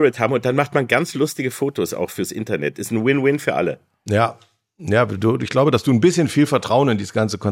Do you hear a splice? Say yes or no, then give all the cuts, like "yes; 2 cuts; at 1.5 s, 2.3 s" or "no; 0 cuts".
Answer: no; 0 cuts